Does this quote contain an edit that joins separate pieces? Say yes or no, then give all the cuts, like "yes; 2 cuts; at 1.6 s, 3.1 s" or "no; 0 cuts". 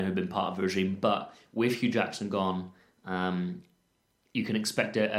no; 0 cuts